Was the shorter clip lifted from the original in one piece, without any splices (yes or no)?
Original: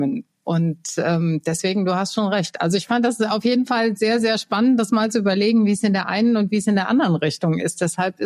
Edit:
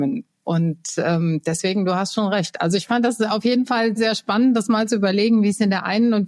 no